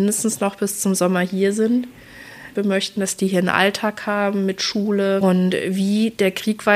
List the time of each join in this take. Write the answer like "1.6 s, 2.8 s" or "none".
2.6 s, 5.2 s